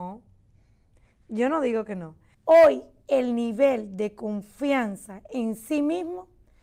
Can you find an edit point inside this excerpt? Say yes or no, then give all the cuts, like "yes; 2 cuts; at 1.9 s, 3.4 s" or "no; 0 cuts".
yes; 1 cut; at 2.3 s